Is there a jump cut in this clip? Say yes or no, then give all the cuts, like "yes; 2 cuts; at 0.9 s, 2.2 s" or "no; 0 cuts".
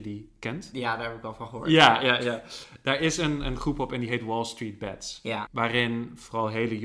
yes; 1 cut; at 5.5 s